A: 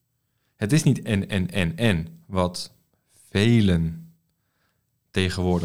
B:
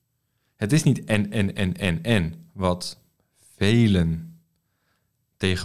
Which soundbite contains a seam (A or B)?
A